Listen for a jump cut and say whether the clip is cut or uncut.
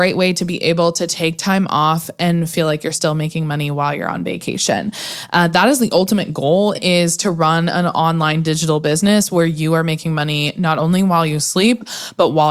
cut